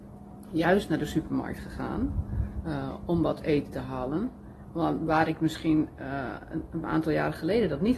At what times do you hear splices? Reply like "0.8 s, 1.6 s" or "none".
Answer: none